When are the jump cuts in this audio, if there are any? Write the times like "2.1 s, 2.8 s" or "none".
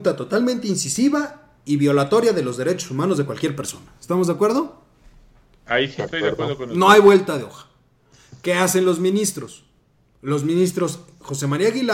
none